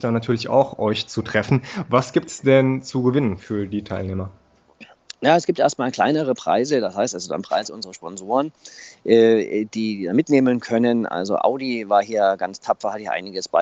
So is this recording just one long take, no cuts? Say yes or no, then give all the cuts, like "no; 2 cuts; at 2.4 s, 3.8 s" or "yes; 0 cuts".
yes; 0 cuts